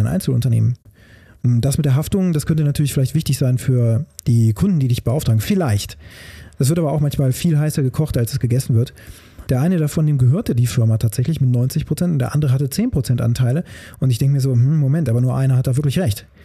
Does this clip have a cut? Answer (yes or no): yes